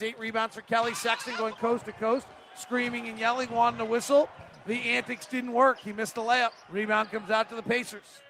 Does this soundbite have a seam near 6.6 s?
yes; 1 cut; at 6.6 s

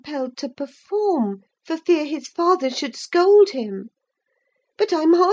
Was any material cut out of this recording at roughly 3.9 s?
no; 1 cut; at 1.5 s

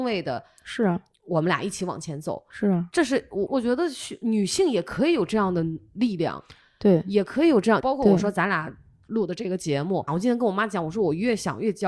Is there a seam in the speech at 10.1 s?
yes; 3 cuts; at 3.5 s, 7.8 s, 10.1 s

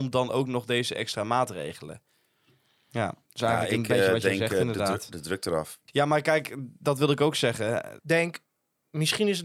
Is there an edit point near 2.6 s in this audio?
no; 2 cuts; at 5.9 s, 8.0 s

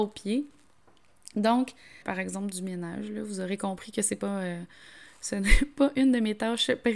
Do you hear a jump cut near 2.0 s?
yes; 1 cut; at 2.0 s

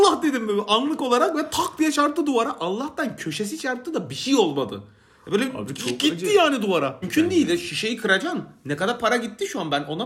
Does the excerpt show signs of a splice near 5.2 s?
no; 1 cut; at 7.0 s

